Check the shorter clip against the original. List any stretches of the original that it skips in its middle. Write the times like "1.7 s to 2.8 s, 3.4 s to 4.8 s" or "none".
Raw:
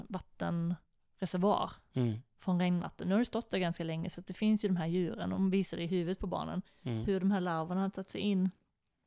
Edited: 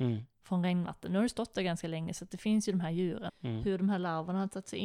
5.2 s to 6.7 s